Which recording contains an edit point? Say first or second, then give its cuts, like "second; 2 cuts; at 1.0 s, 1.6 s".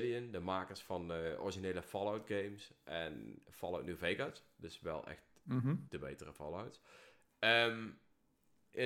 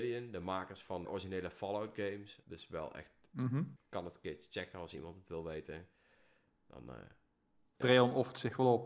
second; 3 cuts; at 1.0 s, 2.4 s, 3.8 s